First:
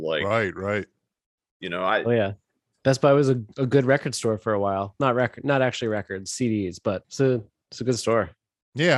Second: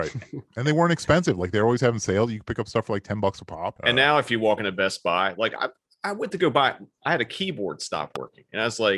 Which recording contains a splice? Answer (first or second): second